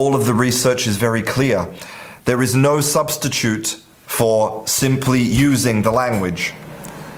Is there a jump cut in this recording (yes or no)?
no